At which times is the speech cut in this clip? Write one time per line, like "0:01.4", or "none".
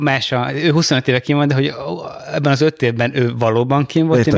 none